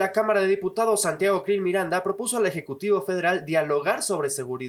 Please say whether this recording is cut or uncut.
uncut